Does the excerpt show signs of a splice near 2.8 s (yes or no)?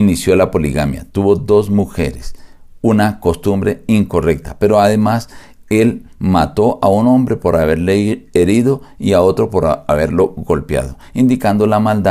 no